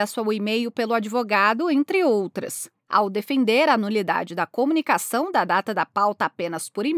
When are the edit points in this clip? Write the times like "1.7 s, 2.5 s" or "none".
2.7 s